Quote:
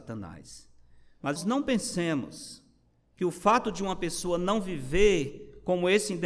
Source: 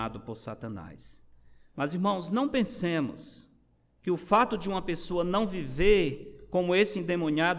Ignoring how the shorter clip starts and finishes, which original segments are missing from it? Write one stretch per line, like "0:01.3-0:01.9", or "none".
0:01.9-0:02.2